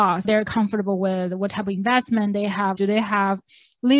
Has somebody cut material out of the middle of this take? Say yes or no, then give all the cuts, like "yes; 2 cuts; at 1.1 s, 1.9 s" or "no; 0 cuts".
yes; 1 cut; at 2.7 s